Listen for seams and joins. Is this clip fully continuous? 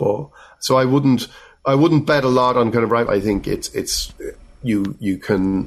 no; 1 cut; at 3.1 s

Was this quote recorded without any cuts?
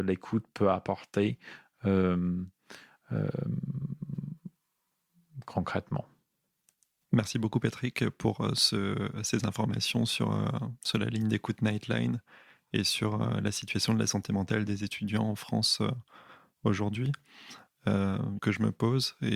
no; 1 cut; at 18.4 s

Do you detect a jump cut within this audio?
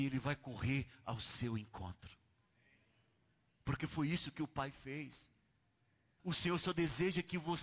yes; 1 cut; at 6.2 s

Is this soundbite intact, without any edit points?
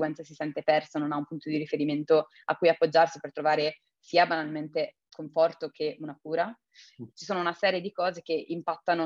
no; 1 cut; at 7.1 s

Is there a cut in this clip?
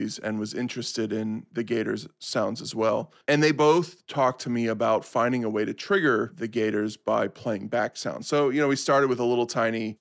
yes; 1 cut; at 3.2 s

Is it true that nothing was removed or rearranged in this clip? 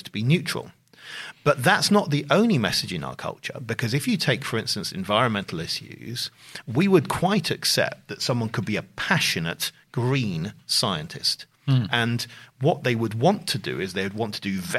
yes; 0 cuts

